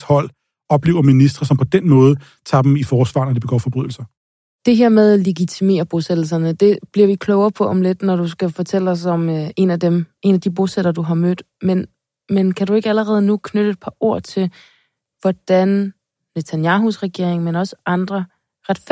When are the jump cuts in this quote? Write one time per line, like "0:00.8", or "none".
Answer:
none